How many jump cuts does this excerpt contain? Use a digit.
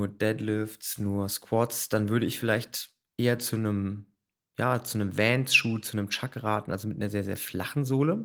0